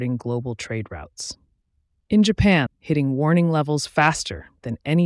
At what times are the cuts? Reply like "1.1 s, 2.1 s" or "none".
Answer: 2.7 s